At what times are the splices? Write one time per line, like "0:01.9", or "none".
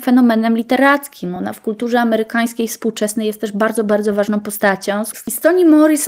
none